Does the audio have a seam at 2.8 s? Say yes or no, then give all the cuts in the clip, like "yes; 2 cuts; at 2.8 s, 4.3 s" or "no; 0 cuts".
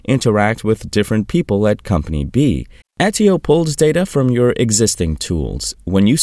yes; 1 cut; at 2.8 s